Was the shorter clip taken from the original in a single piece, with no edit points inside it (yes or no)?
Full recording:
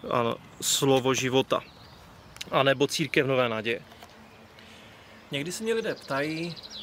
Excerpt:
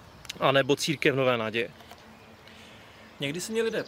yes